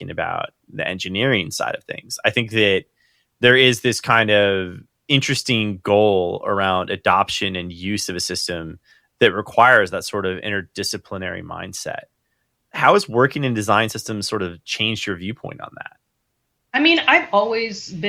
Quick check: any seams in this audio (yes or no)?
no